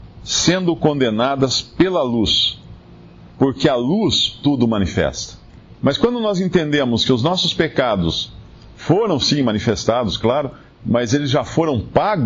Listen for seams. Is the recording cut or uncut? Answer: cut